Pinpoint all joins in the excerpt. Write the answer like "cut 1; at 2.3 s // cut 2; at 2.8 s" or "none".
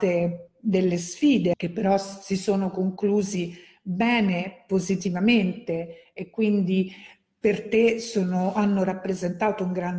cut 1; at 1.5 s